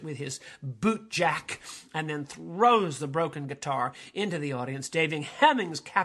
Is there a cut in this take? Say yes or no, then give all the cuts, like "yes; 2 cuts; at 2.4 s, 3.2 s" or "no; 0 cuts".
no; 0 cuts